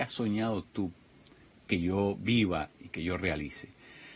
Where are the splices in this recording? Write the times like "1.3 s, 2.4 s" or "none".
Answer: none